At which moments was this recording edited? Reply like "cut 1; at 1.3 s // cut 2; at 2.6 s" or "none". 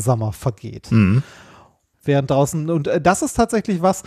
cut 1; at 1.9 s